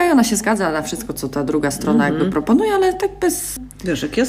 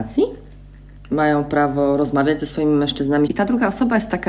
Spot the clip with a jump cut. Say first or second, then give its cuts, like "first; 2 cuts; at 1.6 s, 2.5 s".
second; 1 cut; at 3.3 s